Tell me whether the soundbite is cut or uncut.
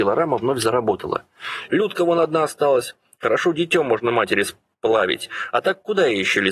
cut